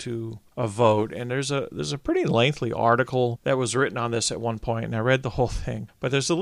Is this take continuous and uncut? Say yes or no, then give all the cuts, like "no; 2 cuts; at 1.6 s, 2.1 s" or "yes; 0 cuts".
yes; 0 cuts